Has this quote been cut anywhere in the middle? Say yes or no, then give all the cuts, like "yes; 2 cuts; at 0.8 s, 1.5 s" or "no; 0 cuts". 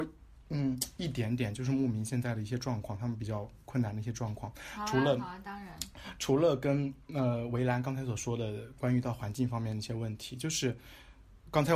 no; 0 cuts